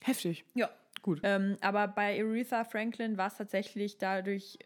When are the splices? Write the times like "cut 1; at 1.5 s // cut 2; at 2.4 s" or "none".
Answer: cut 1; at 1.2 s